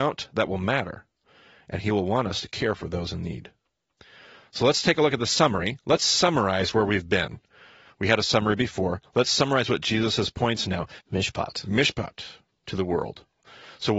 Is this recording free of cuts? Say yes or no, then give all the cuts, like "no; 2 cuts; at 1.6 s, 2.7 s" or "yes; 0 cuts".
no; 1 cut; at 11.0 s